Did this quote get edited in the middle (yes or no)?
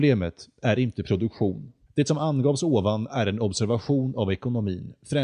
yes